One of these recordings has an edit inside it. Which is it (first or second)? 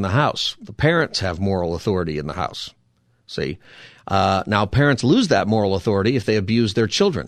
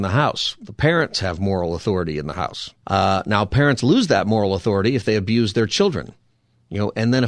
second